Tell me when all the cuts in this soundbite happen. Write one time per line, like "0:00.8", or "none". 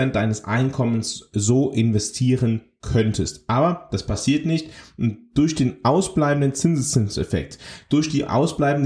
none